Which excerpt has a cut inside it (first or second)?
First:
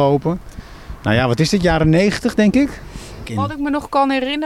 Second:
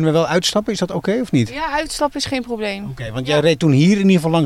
first